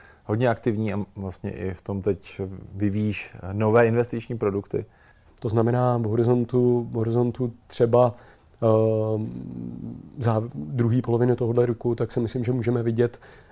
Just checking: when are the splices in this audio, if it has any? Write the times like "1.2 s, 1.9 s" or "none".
5.3 s